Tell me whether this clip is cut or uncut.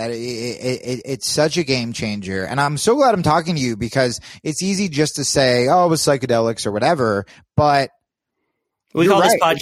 uncut